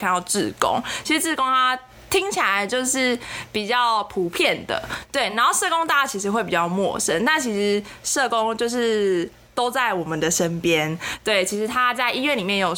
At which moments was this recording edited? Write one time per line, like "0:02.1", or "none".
none